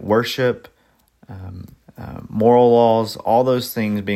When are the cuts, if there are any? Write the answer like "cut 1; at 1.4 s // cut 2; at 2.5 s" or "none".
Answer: cut 1; at 1.8 s